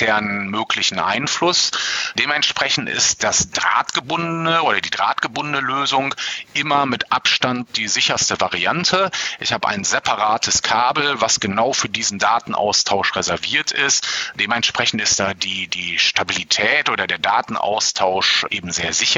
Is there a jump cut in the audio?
no; 0 cuts

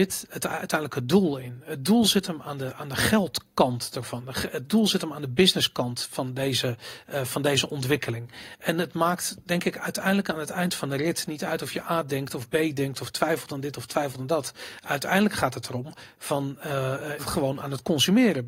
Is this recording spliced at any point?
yes; 1 cut; at 17.2 s

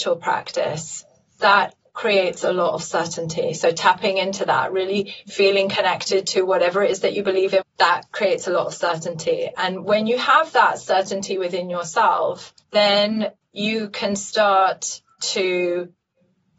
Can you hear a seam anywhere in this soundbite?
yes; 2 cuts; at 7.6 s, 12.6 s

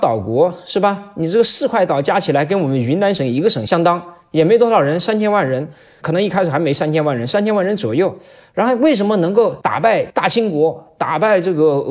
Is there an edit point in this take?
no; 0 cuts

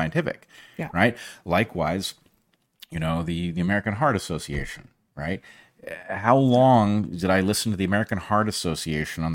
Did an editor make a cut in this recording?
no; 0 cuts

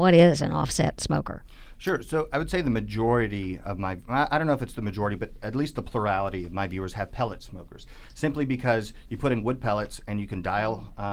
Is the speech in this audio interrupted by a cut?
no; 0 cuts

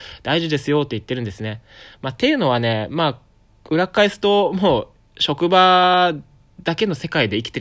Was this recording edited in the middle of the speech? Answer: no; 0 cuts

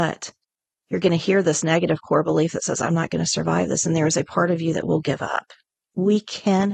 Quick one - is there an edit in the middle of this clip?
yes; 1 cut; at 5.8 s

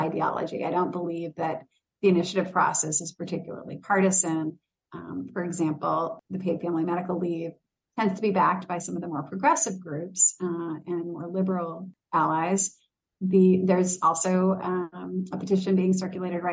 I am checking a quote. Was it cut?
no; 0 cuts

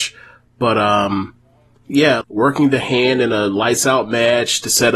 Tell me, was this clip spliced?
yes; 1 cut; at 2.2 s

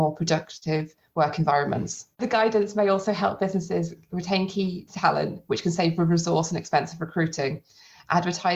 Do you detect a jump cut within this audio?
yes; 1 cut; at 2.1 s

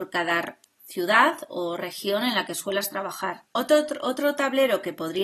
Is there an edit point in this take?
yes; 1 cut; at 3.4 s

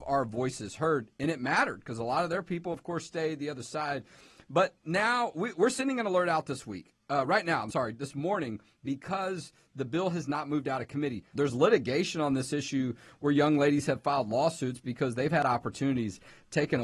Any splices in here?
yes; 1 cut; at 11.4 s

